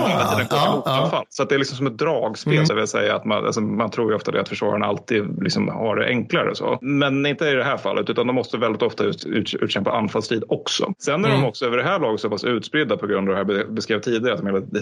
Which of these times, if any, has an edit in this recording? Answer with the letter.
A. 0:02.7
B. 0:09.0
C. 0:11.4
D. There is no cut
A